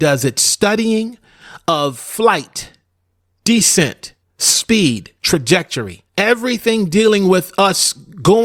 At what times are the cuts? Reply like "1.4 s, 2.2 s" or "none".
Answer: 4.2 s, 6.1 s